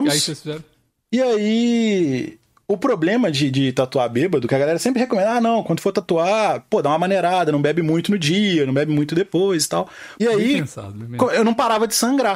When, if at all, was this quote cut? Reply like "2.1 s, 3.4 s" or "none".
10.2 s

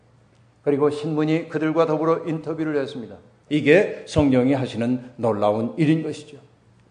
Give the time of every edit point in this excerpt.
3.5 s

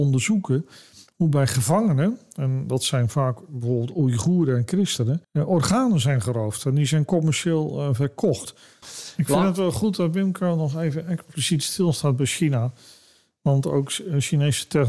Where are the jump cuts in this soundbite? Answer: 5.2 s, 8.8 s

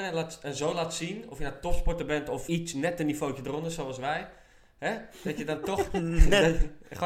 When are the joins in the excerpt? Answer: 2.5 s

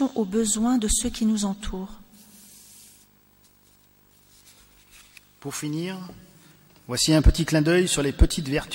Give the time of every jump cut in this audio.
none

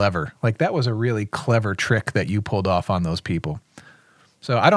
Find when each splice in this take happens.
none

